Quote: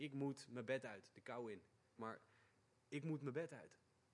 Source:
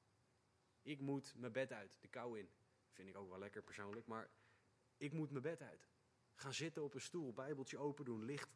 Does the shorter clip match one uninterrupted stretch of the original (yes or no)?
no